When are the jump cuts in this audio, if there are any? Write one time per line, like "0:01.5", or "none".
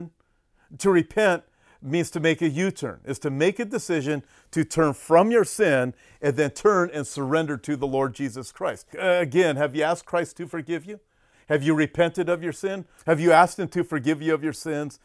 0:08.9
0:13.0